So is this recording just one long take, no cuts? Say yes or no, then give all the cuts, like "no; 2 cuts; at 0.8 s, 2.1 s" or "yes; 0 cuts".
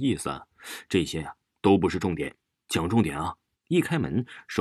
no; 1 cut; at 3.5 s